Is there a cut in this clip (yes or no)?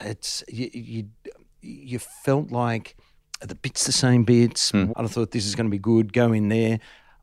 yes